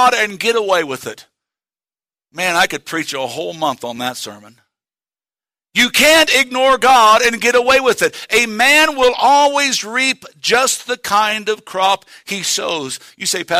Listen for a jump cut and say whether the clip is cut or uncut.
uncut